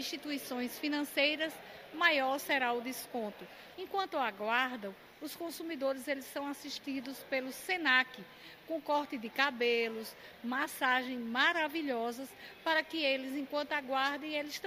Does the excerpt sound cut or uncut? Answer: cut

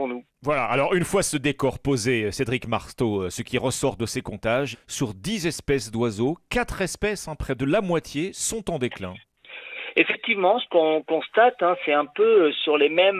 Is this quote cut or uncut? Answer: cut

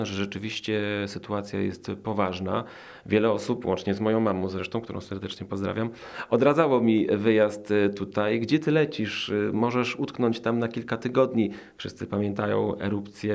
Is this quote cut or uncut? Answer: uncut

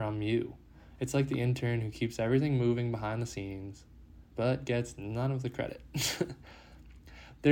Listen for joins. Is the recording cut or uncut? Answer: uncut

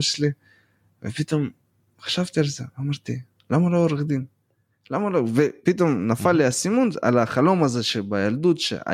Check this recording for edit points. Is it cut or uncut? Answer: uncut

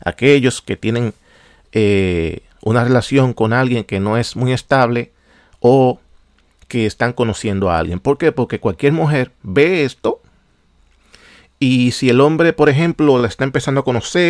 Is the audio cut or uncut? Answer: uncut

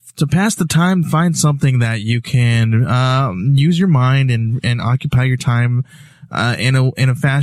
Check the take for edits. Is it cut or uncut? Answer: uncut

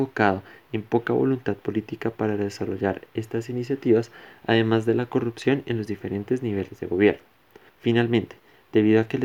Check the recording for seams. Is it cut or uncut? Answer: cut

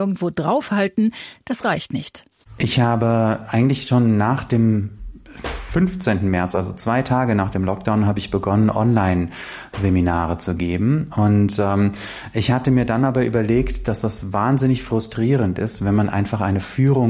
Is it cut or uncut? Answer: uncut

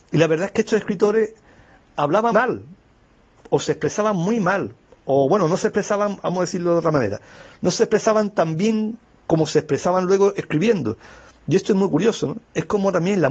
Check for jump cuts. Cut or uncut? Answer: cut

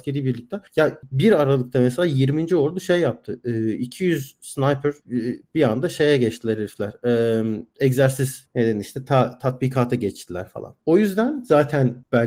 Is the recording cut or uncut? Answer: cut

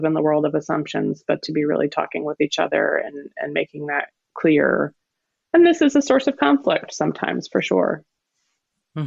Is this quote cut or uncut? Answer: uncut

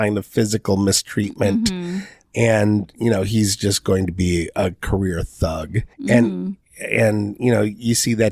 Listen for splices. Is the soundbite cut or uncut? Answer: cut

